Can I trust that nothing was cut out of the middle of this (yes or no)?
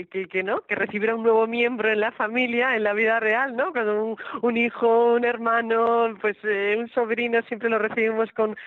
yes